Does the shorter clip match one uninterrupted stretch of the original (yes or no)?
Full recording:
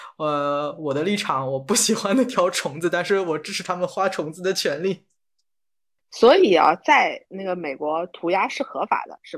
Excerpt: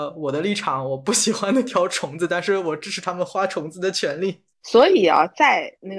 no